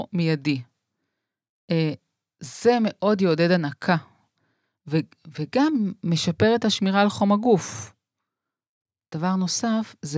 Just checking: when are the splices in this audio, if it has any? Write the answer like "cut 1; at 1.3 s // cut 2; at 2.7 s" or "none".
none